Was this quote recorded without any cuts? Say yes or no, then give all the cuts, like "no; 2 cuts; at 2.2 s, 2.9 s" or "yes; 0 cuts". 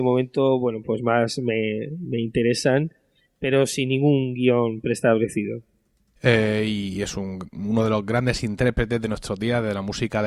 no; 1 cut; at 6.2 s